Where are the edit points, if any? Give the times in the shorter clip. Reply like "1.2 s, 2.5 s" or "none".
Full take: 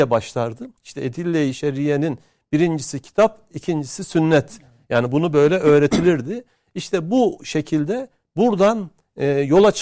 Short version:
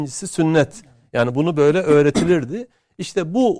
none